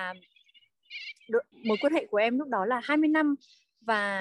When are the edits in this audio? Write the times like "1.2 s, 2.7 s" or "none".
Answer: 1.5 s